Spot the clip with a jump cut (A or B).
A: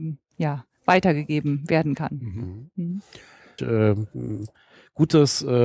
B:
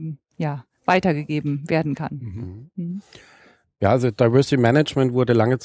A